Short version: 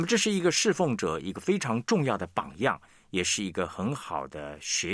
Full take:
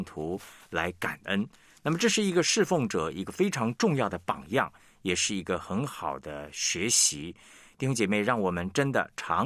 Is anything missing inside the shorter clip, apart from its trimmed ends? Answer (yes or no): no